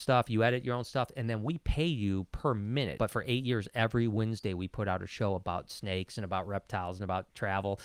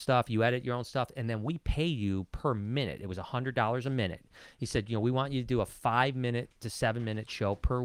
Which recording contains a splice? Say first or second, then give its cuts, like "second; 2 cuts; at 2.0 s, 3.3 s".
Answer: first; 1 cut; at 3.0 s